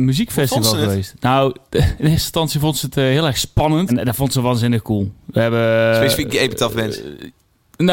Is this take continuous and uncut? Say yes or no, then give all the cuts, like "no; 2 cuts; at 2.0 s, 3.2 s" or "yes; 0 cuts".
no; 2 cuts; at 1.7 s, 3.9 s